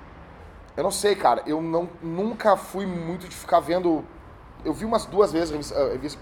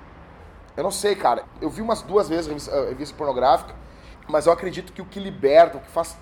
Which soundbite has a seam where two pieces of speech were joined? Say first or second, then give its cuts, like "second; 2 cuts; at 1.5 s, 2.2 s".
second; 2 cuts; at 1.4 s, 4.1 s